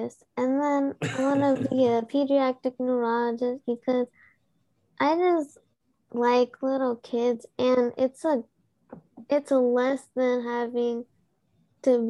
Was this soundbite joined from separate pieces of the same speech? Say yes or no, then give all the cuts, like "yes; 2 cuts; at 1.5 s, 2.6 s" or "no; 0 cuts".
no; 0 cuts